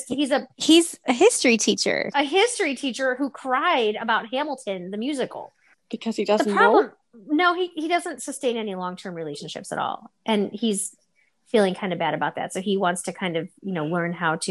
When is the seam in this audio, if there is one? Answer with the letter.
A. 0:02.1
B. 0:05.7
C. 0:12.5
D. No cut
B